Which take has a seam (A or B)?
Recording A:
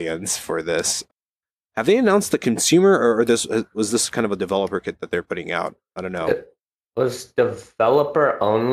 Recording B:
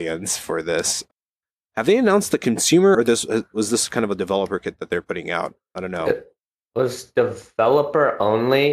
B